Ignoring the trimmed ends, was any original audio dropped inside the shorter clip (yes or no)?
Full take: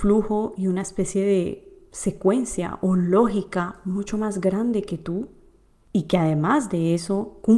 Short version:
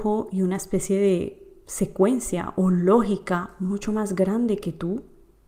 no